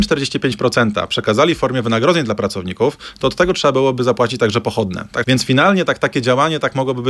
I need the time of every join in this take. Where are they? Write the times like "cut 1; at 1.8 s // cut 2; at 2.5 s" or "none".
cut 1; at 5.2 s